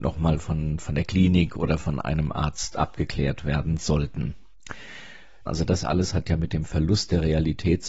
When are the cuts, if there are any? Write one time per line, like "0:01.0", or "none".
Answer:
0:05.5